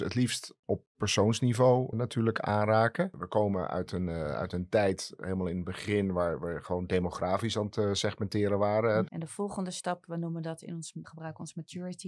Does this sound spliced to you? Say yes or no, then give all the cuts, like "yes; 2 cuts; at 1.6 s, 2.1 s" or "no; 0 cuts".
yes; 3 cuts; at 1.9 s, 9.1 s, 11.0 s